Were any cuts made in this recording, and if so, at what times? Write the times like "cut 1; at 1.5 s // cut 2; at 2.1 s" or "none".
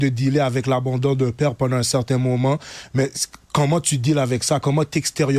cut 1; at 3.4 s